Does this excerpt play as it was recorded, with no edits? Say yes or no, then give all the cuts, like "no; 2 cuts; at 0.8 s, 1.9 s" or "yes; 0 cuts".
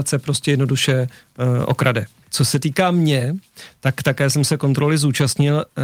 no; 1 cut; at 2.2 s